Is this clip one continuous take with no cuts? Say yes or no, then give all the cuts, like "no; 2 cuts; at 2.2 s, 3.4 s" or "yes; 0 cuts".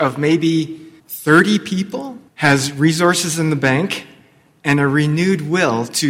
no; 2 cuts; at 1.0 s, 2.3 s